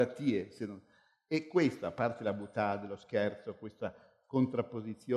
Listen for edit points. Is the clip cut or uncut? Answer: uncut